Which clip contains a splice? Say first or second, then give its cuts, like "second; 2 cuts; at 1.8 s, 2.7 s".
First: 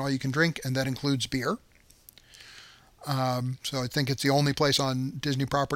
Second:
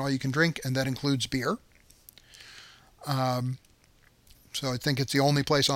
first; 1 cut; at 3.6 s